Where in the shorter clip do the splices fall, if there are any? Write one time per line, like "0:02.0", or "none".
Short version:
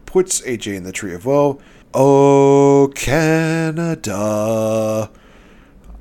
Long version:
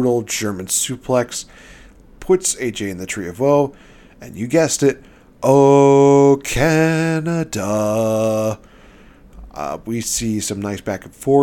0:01.8